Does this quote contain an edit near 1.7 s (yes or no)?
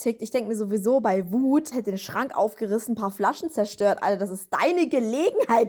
yes